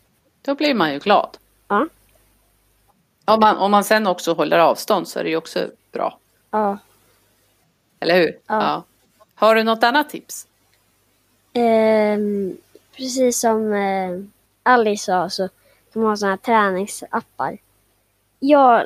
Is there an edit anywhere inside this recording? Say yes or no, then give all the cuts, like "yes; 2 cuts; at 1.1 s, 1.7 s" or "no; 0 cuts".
no; 0 cuts